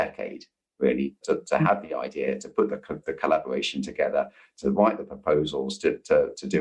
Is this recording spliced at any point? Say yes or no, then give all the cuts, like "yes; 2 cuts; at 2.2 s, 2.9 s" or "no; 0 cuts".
yes; 2 cuts; at 1.2 s, 3.0 s